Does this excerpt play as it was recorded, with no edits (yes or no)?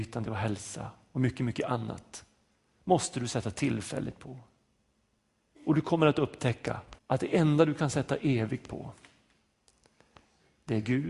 no